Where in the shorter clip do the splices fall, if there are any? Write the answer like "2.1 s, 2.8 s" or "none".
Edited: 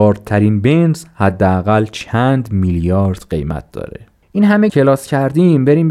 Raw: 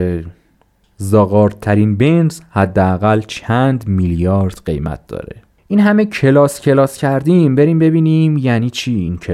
4.7 s